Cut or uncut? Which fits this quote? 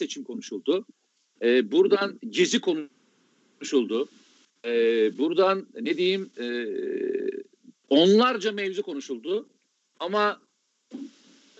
uncut